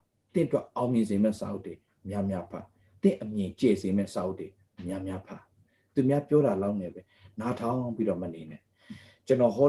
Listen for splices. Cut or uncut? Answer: uncut